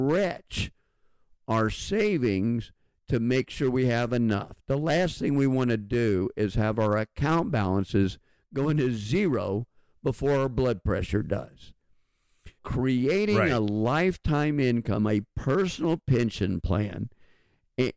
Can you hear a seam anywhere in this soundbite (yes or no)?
yes